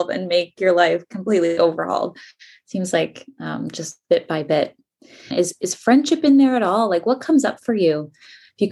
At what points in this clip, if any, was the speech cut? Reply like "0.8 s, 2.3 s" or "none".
5.3 s